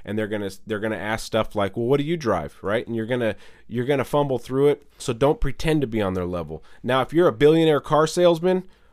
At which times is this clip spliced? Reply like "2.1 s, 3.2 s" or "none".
5.0 s